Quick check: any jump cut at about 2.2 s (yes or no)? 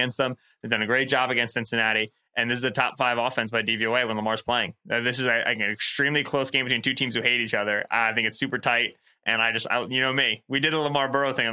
no